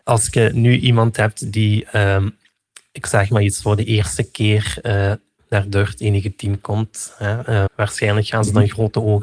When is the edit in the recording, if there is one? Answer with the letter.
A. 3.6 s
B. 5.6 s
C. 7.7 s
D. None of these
C